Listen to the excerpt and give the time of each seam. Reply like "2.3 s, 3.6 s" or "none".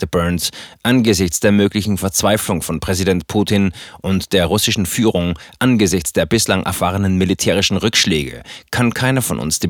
none